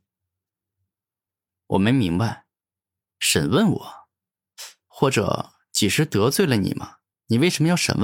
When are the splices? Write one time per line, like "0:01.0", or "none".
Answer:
0:01.5
0:04.9